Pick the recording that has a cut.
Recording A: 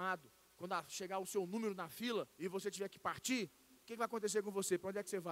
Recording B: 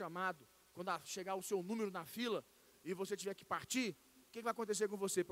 A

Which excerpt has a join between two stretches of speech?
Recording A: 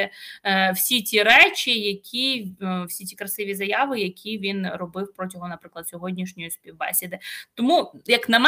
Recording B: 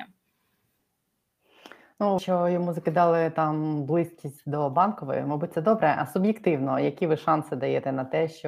B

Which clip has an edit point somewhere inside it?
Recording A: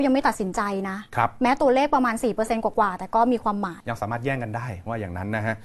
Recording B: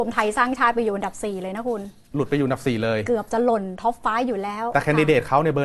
A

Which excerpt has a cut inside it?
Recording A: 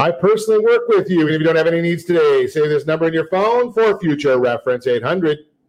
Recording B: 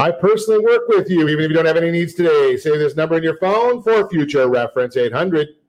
A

